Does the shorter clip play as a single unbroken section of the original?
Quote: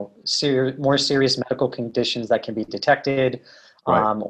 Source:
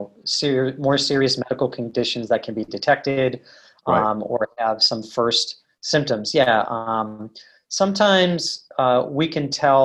yes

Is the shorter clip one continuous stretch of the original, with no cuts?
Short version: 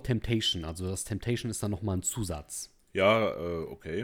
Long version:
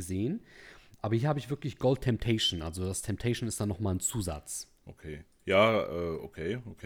no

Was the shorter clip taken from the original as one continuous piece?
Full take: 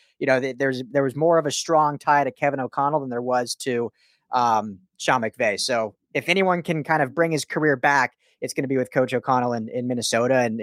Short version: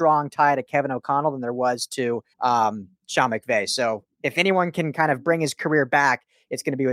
no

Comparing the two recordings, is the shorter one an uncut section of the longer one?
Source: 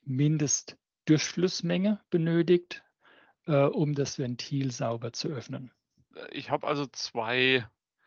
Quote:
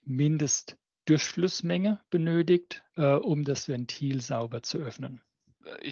no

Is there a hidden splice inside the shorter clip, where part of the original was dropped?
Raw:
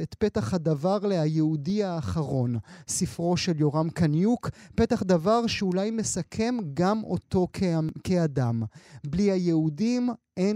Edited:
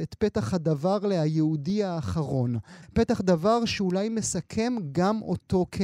yes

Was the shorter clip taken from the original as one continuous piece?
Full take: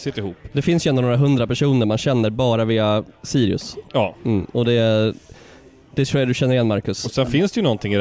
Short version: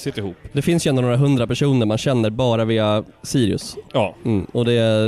yes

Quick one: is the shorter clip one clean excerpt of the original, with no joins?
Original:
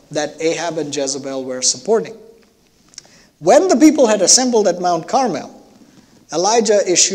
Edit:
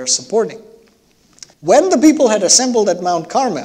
no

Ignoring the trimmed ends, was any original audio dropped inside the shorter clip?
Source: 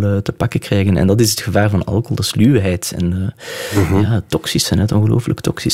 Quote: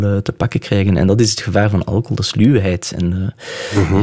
no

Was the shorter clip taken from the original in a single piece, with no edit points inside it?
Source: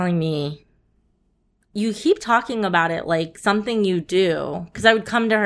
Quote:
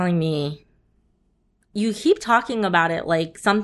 yes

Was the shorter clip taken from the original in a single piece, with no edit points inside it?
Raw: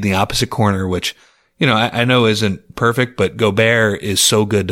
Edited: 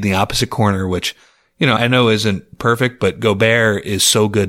no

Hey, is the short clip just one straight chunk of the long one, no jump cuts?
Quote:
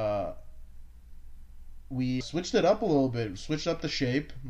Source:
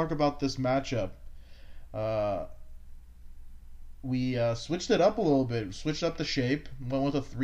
no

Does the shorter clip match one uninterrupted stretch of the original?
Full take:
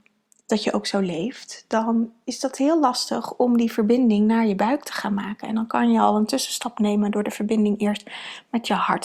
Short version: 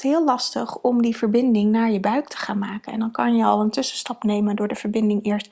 yes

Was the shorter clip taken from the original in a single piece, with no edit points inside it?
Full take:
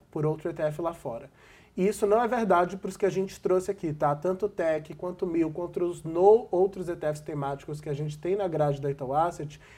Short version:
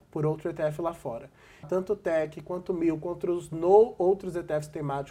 no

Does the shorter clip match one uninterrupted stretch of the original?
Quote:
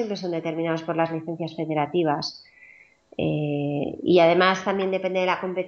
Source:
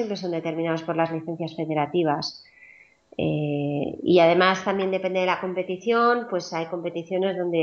yes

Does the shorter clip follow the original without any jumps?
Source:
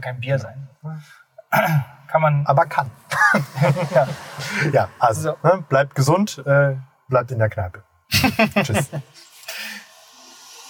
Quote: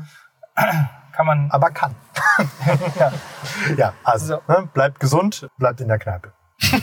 no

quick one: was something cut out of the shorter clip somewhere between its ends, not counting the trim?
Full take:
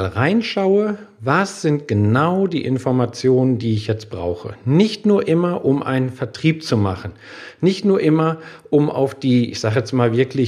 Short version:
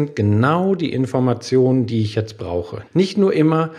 yes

